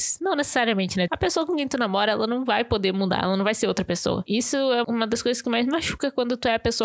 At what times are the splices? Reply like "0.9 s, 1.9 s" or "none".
1.1 s, 4.8 s